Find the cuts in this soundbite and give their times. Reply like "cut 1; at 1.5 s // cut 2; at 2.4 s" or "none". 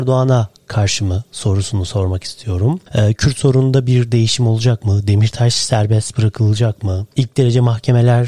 none